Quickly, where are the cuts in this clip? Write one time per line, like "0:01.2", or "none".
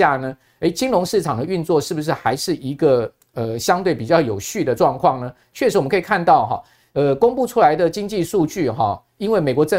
none